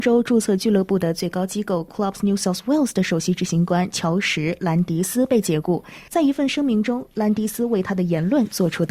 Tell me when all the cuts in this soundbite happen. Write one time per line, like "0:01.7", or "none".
0:06.1